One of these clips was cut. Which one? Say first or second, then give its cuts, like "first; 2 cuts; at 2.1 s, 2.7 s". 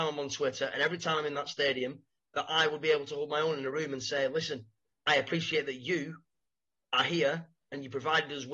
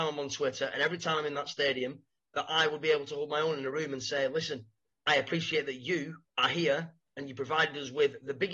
second; 1 cut; at 6.3 s